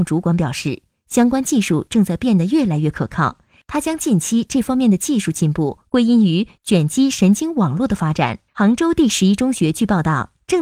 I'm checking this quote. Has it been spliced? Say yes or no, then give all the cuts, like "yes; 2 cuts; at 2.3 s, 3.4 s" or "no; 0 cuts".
yes; 1 cut; at 8.5 s